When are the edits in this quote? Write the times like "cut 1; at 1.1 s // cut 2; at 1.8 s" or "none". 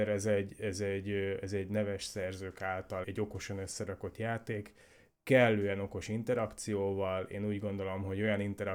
cut 1; at 3.0 s